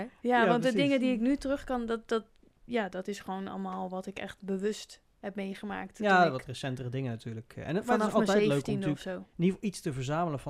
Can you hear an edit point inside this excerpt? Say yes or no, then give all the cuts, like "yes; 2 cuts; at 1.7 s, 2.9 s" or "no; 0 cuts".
no; 0 cuts